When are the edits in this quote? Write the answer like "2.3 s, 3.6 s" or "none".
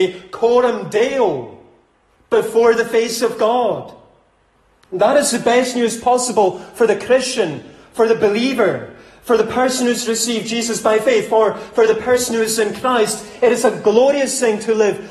none